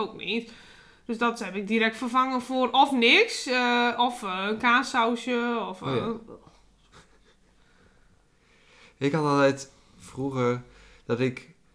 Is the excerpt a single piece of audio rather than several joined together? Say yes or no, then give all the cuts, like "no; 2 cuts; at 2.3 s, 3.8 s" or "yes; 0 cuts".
yes; 0 cuts